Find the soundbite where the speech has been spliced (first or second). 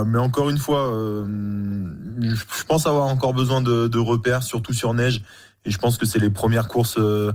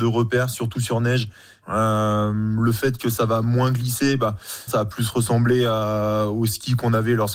second